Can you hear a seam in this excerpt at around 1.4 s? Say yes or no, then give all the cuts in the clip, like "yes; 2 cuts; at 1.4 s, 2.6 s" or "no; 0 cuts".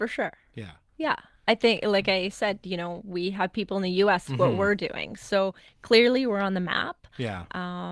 no; 1 cut; at 4.3 s